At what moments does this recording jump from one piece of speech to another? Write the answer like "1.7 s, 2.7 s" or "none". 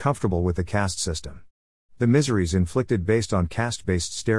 none